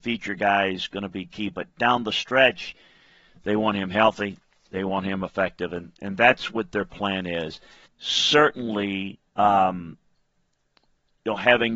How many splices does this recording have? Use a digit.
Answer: 2